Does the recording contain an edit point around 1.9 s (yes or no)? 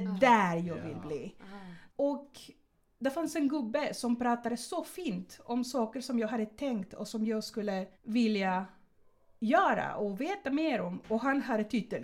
yes